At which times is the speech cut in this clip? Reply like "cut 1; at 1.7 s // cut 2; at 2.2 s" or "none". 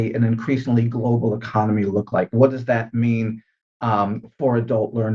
none